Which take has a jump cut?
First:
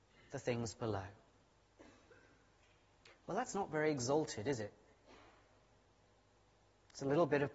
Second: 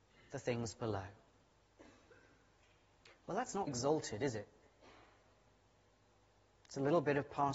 second; 1 cut; at 3.7 s

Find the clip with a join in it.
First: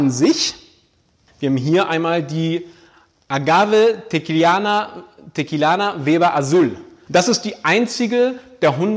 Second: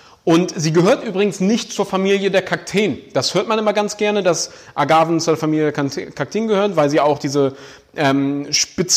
first; 2 cuts; at 1.3 s, 7.1 s

